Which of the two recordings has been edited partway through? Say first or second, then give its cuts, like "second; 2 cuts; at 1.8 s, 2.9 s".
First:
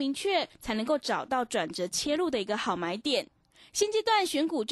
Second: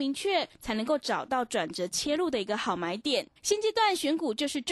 second; 1 cut; at 3.4 s